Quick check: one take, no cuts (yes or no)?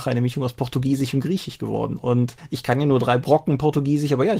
yes